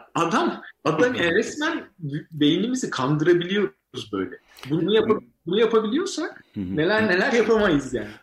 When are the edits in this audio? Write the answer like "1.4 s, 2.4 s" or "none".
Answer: 4.8 s